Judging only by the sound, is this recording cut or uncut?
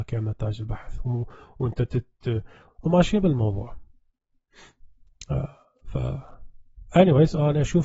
cut